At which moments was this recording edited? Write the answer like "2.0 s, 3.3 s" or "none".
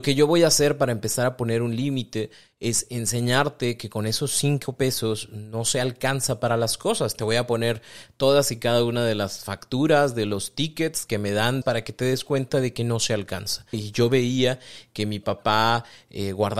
11.6 s, 13.7 s